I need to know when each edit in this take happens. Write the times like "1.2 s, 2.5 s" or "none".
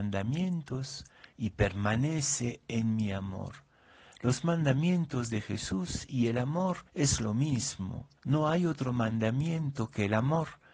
6.9 s, 8.2 s